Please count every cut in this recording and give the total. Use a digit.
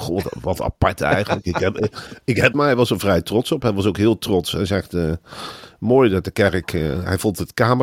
1